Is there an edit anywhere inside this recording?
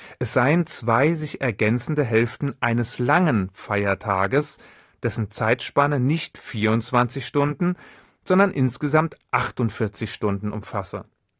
no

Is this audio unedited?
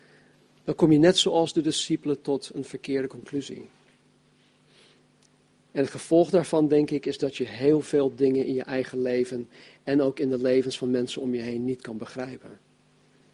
yes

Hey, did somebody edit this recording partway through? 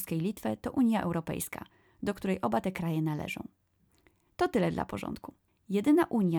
yes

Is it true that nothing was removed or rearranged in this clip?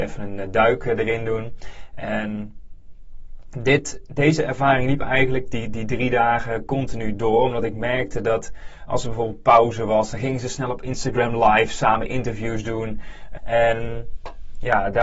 no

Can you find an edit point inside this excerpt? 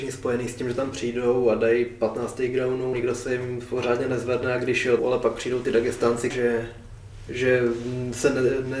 yes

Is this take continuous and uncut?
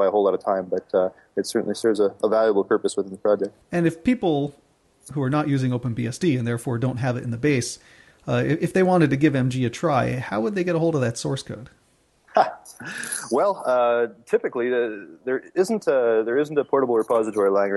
no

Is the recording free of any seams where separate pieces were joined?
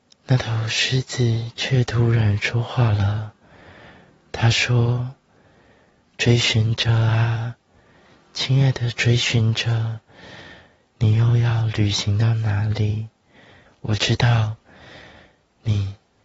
no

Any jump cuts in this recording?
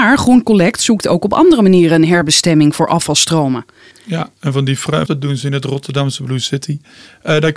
yes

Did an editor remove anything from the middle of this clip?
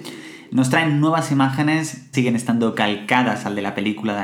yes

